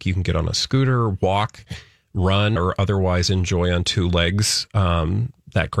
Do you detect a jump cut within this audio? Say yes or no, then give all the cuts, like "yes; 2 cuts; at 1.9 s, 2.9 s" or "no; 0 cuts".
yes; 1 cut; at 2.6 s